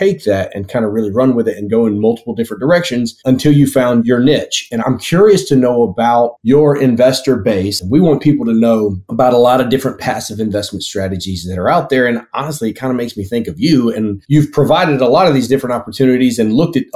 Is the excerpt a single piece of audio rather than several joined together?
no; 1 cut; at 7.8 s

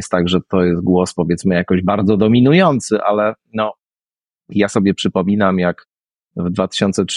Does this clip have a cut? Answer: no; 0 cuts

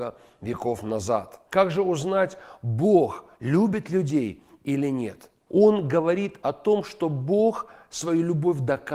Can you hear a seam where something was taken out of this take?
yes; 2 cuts; at 1.5 s, 5.5 s

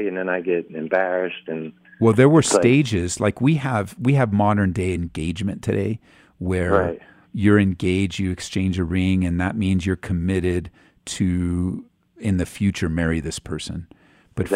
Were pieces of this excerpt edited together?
no; 0 cuts

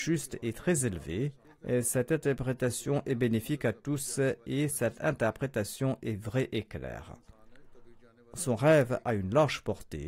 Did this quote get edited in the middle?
yes; 1 cut; at 1.4 s

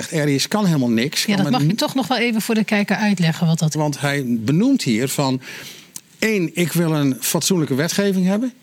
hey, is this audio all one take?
no; 1 cut; at 3.7 s

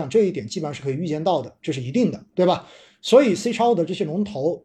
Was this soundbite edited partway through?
no; 0 cuts

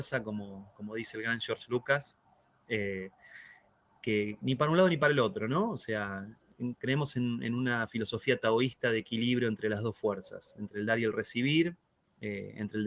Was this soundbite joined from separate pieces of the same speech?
no; 0 cuts

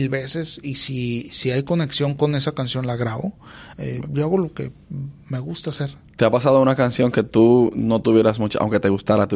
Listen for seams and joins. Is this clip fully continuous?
no; 1 cut; at 3.7 s

